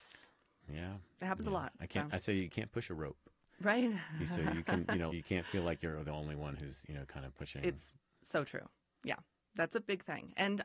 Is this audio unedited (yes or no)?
no